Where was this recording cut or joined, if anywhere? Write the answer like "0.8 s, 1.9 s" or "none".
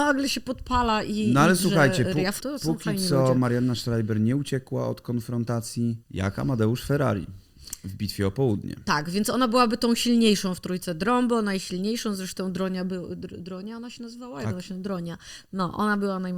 2.4 s, 6.0 s

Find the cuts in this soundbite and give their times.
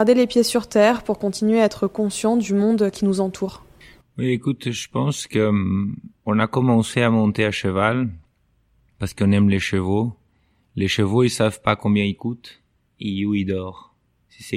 none

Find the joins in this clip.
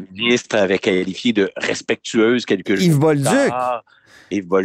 none

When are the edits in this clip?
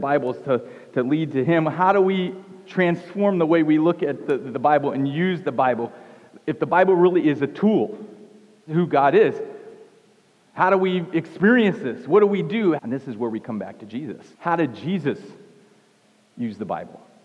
8.7 s, 12.8 s, 14.3 s

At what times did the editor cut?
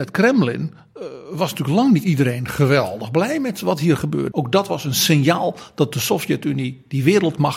4.3 s

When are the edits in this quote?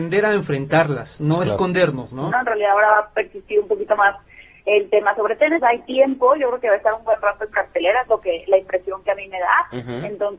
2.3 s, 5.6 s

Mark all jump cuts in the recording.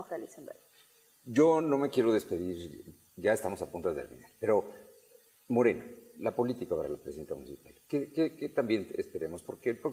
none

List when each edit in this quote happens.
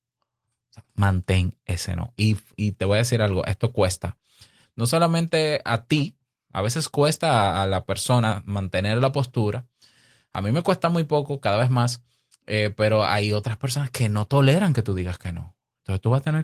none

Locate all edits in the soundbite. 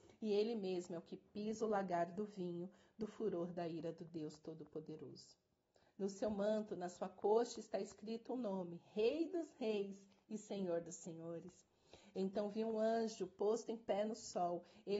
none

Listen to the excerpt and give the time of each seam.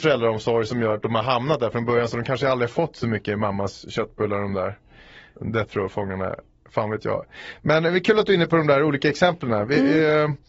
none

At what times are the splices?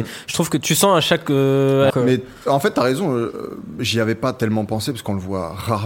1.9 s

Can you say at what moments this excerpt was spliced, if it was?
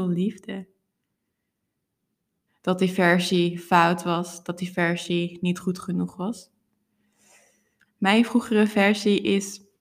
2.5 s, 7.8 s

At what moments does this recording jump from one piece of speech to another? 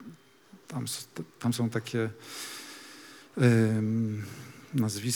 none

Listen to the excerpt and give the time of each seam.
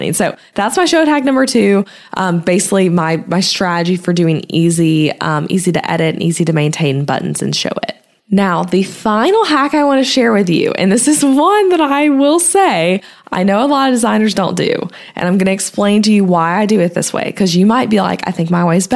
none

